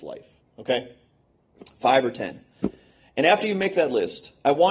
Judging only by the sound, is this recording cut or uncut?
uncut